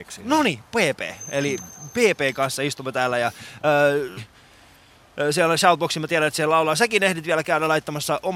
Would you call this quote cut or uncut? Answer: cut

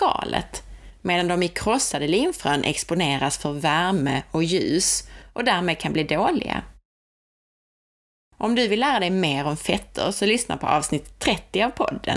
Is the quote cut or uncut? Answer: uncut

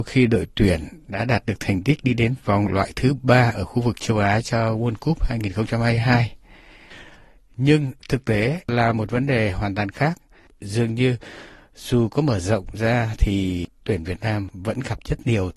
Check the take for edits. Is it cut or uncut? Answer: uncut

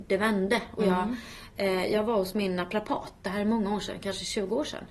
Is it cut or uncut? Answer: uncut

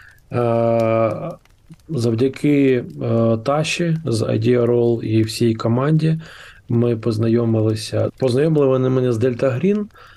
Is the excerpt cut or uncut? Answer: cut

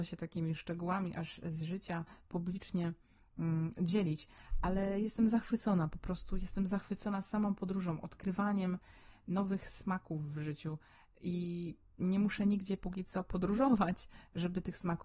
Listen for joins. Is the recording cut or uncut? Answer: uncut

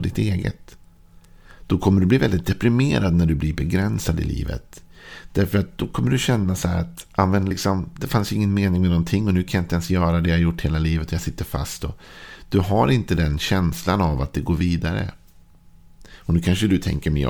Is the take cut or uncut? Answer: uncut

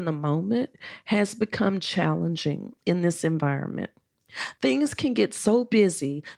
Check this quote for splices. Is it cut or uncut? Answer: cut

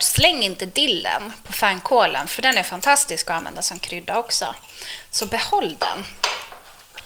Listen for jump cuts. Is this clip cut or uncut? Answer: uncut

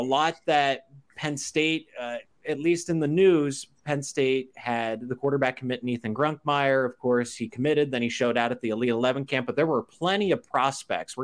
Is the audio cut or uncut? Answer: uncut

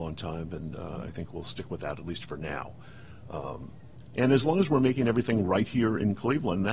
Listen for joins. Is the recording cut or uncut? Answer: uncut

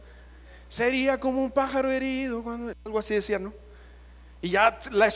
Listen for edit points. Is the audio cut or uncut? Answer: uncut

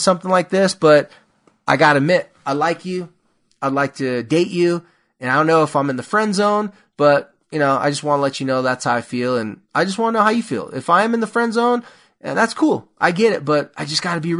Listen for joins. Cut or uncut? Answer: uncut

